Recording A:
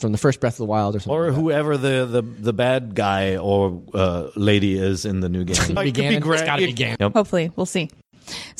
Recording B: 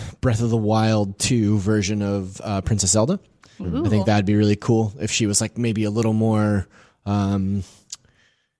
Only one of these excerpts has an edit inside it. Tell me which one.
A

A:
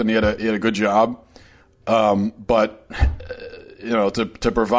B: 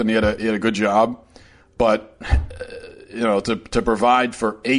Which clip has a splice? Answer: B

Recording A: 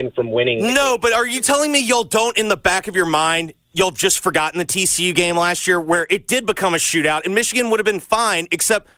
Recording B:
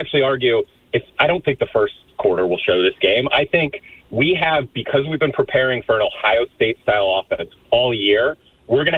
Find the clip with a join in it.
B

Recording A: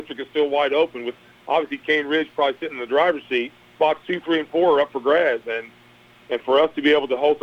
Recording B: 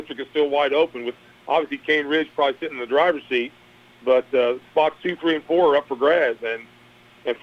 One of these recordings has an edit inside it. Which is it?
A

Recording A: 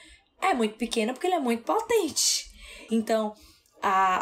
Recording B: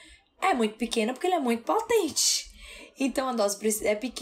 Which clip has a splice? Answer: A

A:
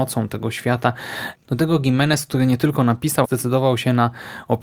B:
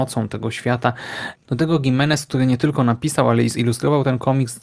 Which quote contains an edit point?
A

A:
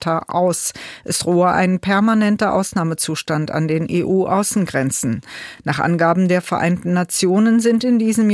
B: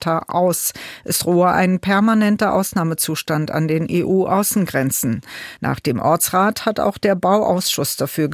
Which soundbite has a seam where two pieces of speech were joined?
B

